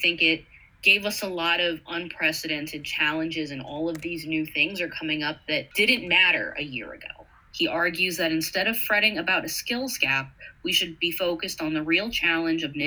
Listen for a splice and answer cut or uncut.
cut